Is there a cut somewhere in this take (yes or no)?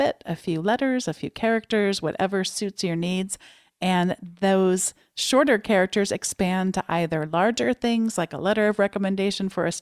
no